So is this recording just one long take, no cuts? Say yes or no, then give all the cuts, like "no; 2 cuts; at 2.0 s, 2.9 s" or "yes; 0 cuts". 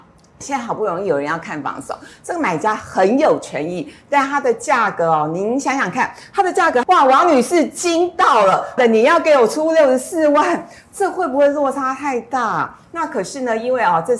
no; 2 cuts; at 6.8 s, 8.8 s